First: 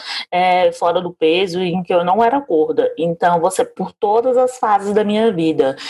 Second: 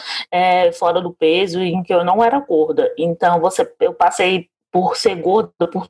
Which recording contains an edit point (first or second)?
first